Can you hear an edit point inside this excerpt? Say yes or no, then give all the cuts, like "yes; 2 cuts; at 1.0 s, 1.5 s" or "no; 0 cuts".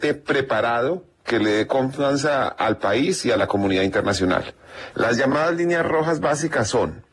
yes; 1 cut; at 4.9 s